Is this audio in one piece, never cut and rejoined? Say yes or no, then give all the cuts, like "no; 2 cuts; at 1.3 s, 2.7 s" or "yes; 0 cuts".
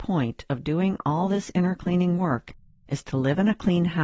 yes; 0 cuts